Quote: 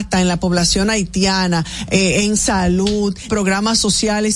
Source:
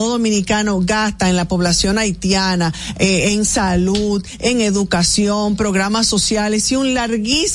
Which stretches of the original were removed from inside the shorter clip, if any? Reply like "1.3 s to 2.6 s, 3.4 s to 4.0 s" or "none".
4.4 s to 5.6 s